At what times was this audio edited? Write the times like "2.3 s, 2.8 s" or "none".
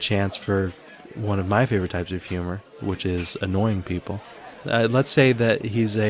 4.6 s